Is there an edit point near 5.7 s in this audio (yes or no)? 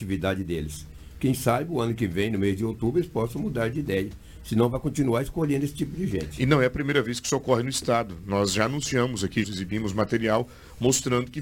no